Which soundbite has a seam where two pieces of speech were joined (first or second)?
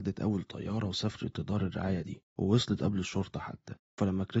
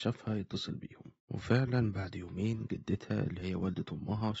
second